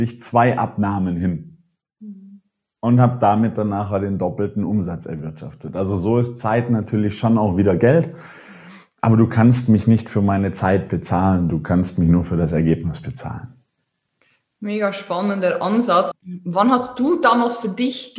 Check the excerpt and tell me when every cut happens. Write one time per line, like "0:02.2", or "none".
0:16.1